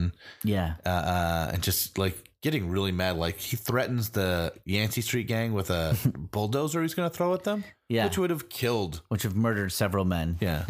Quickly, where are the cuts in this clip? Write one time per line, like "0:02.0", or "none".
none